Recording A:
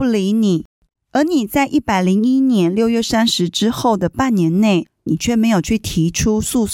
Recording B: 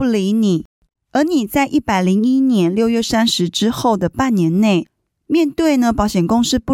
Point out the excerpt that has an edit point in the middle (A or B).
A